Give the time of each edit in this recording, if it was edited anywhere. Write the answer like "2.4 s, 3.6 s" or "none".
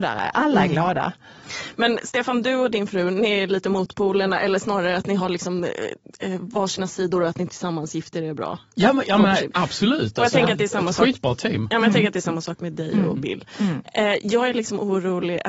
none